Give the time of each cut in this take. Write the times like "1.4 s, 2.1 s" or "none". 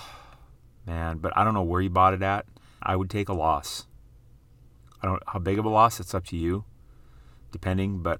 2.8 s